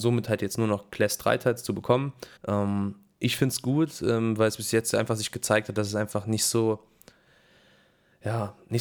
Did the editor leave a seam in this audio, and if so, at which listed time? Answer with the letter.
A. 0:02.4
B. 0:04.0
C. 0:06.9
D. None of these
A